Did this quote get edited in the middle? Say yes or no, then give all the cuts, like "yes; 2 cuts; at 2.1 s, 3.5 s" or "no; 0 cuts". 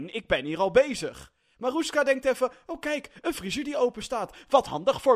no; 0 cuts